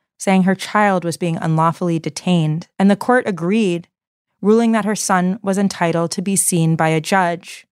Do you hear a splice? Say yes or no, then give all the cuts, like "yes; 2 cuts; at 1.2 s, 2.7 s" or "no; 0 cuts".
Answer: yes; 1 cut; at 2.7 s